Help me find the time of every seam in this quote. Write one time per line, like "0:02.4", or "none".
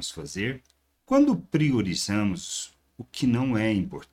0:01.0